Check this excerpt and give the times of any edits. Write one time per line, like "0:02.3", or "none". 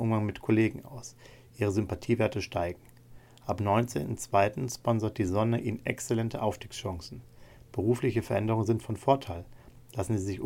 none